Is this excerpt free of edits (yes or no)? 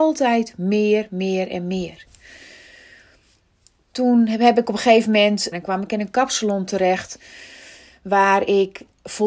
no